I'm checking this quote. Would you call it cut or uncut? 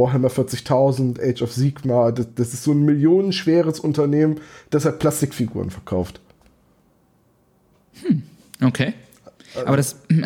uncut